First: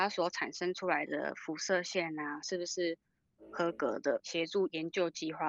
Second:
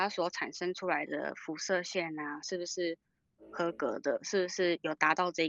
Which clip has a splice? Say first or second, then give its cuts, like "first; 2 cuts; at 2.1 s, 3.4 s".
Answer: first; 1 cut; at 4.2 s